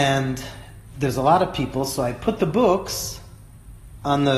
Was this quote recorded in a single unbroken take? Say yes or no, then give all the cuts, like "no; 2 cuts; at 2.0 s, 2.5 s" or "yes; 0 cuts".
yes; 0 cuts